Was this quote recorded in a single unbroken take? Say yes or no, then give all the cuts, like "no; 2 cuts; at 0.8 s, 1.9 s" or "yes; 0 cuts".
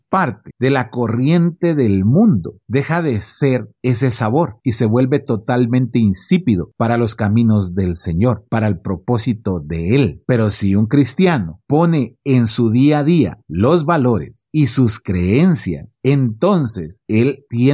yes; 0 cuts